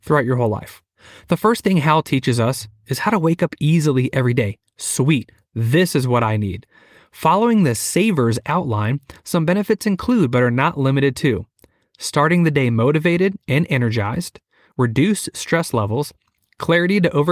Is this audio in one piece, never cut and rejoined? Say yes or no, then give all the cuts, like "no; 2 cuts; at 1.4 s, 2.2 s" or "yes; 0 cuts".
yes; 0 cuts